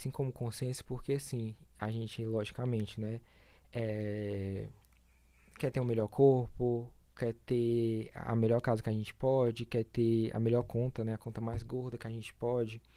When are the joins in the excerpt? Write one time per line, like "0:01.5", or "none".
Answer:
none